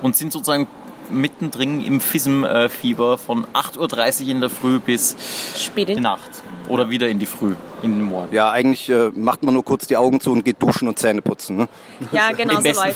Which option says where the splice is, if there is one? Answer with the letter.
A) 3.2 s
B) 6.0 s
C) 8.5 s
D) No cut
B